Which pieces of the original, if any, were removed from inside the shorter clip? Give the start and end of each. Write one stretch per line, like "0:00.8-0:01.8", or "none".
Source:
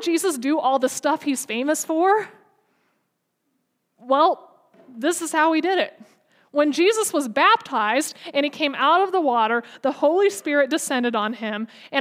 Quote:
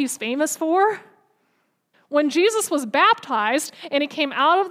0:03.2-0:06.4